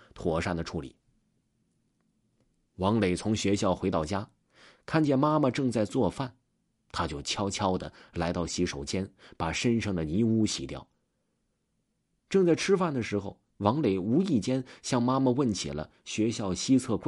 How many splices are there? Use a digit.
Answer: 0